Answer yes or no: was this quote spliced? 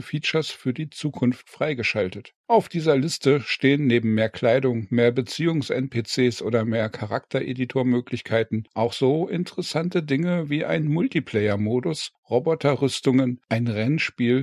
no